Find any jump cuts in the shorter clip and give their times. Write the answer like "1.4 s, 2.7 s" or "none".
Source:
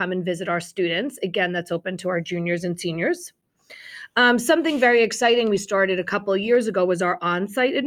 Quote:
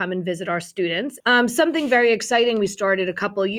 1.2 s